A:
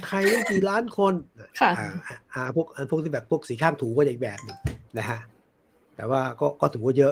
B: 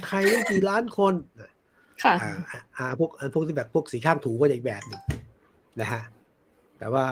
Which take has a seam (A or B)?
A